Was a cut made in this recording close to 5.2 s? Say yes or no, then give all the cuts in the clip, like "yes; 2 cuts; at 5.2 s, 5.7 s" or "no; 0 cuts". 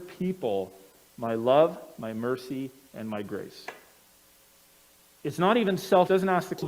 yes; 1 cut; at 5.2 s